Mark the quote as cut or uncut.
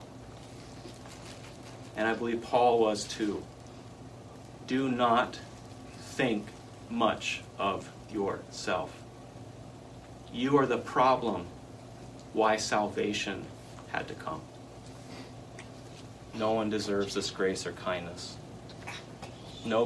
cut